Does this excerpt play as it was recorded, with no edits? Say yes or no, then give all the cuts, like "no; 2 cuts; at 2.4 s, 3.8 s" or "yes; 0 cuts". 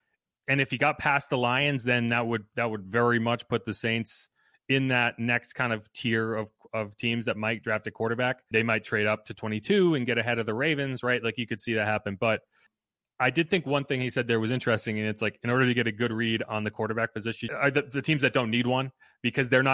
no; 1 cut; at 17.5 s